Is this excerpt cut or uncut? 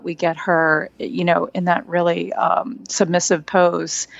uncut